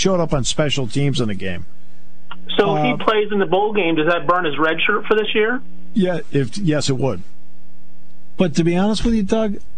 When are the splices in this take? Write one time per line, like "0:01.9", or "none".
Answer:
none